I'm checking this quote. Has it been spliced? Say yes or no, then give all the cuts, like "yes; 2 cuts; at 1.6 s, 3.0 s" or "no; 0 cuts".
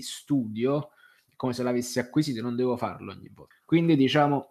yes; 1 cut; at 3.5 s